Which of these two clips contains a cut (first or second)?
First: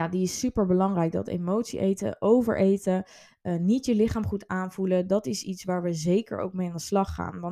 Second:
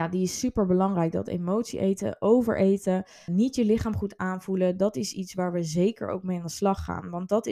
second